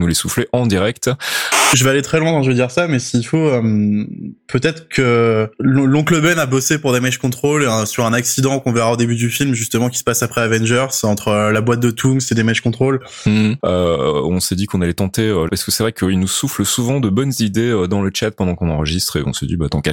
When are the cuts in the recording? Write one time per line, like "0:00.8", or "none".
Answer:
0:13.6
0:15.5